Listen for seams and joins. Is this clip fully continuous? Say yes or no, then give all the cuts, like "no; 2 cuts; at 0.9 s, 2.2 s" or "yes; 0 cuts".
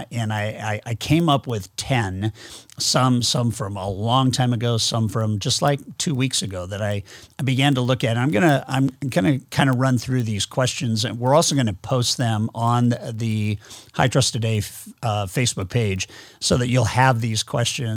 yes; 0 cuts